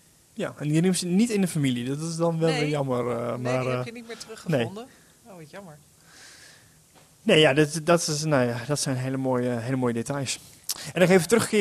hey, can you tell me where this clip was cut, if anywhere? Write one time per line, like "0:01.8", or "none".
none